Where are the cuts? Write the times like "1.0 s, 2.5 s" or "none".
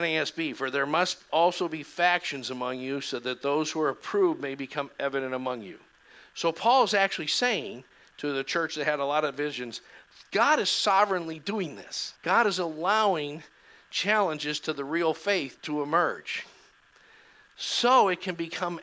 12.2 s, 15.6 s

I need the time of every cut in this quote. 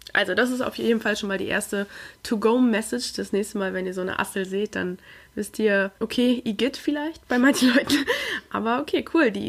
6.0 s

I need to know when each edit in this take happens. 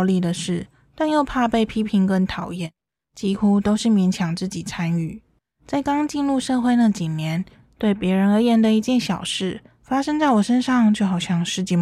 7.6 s

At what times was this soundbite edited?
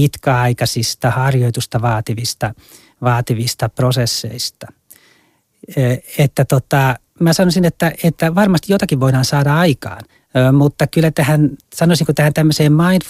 11.6 s

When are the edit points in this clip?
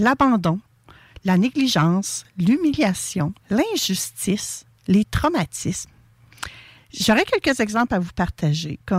3.4 s, 6.8 s

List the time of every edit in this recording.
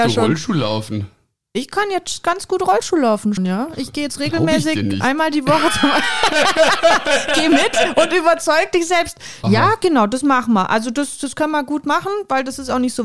3.4 s, 9.4 s

